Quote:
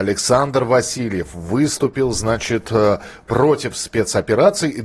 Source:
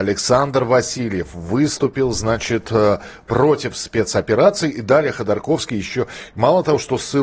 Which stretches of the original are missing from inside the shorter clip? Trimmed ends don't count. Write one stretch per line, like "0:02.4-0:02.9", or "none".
none